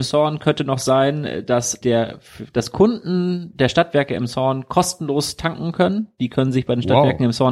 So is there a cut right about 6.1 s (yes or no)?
no